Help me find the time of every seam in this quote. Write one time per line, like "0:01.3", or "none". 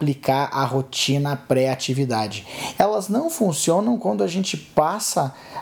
0:02.8